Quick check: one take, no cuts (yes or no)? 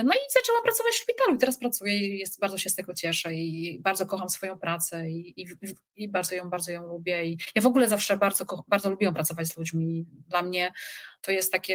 yes